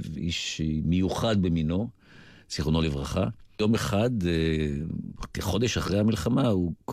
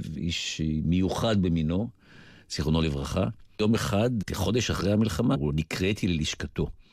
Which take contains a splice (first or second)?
second